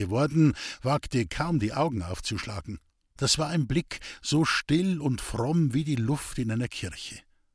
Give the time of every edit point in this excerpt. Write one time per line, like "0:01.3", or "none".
0:03.2